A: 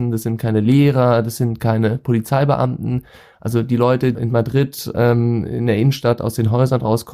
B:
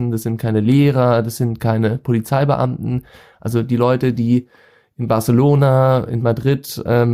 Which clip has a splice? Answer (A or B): A